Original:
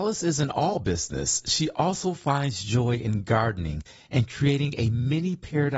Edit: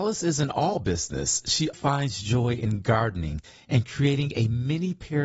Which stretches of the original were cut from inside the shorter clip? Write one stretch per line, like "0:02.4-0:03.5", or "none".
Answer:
0:01.7-0:02.2